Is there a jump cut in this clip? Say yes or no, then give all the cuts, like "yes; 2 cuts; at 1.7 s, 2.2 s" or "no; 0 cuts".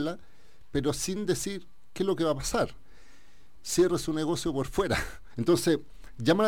yes; 2 cuts; at 3.6 s, 5.3 s